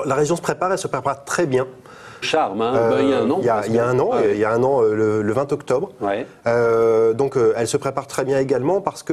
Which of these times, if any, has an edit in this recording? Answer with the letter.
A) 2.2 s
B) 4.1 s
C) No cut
A